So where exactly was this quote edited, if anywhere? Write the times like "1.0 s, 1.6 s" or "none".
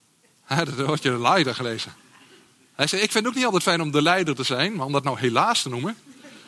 none